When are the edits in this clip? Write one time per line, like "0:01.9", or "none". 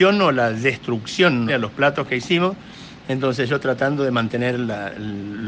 0:01.5